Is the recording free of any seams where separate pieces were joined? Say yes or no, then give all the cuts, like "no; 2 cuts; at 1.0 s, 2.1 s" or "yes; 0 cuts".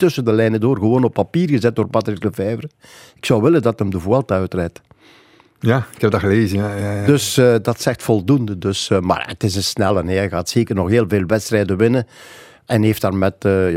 yes; 0 cuts